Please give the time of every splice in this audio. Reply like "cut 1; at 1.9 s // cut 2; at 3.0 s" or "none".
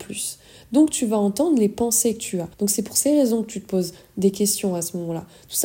cut 1; at 2.5 s